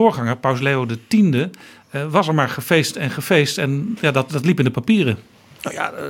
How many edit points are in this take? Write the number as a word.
one